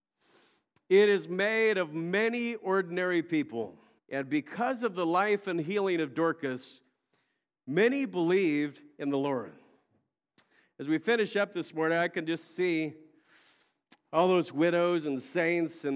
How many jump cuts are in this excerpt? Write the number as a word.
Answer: one